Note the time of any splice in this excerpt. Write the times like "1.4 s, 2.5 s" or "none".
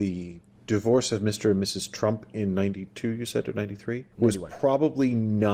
4.1 s